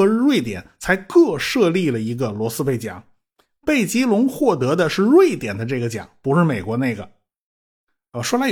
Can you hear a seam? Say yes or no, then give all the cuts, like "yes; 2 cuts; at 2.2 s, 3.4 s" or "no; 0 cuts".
no; 0 cuts